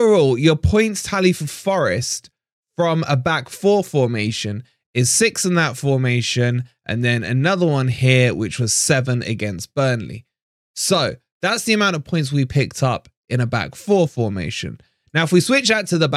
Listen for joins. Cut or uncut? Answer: uncut